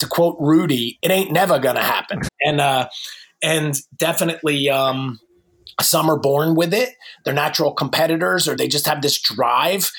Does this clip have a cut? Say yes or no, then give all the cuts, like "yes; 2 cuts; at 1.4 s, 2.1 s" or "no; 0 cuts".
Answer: yes; 2 cuts; at 2.3 s, 8.6 s